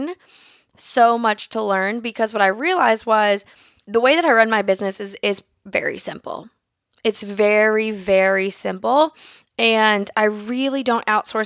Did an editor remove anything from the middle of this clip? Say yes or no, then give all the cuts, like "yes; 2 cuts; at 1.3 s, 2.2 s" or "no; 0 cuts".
no; 0 cuts